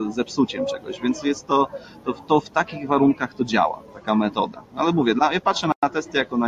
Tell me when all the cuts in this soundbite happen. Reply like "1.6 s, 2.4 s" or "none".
3.9 s